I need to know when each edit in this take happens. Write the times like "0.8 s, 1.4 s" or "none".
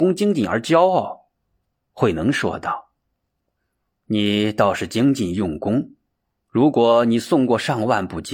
none